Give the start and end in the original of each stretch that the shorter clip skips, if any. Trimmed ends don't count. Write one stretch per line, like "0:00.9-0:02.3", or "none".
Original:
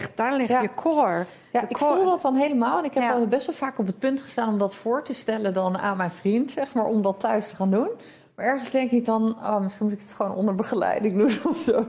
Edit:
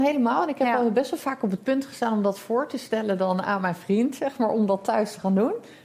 none